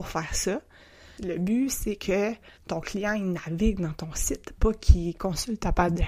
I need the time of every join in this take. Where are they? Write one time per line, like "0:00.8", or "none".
0:01.2
0:02.6